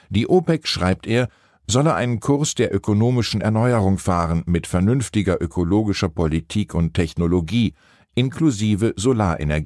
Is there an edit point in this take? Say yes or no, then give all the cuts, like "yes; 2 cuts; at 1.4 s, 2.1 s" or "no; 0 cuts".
no; 0 cuts